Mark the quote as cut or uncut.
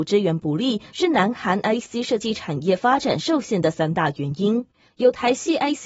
cut